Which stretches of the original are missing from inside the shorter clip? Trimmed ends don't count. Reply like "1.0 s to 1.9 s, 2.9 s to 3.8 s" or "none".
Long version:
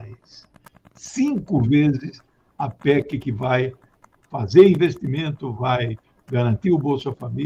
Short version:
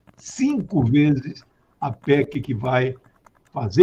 none